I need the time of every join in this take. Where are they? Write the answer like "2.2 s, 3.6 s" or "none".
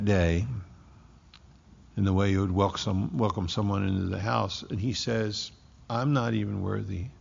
none